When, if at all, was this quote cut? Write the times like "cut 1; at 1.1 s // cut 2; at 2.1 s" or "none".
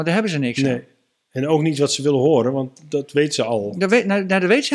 none